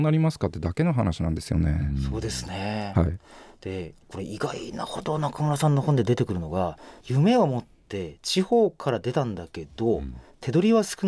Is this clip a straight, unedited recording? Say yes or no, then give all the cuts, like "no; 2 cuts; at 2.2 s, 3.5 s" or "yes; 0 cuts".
yes; 0 cuts